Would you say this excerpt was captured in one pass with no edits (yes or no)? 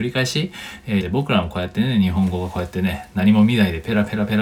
no